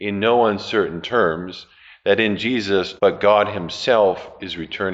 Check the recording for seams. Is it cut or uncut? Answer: cut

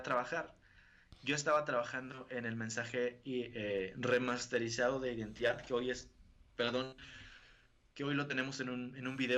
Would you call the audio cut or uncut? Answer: uncut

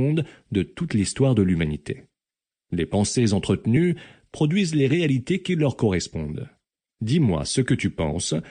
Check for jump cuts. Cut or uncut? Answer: uncut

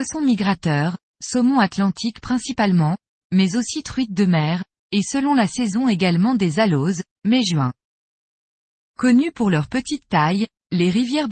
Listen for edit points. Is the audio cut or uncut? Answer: uncut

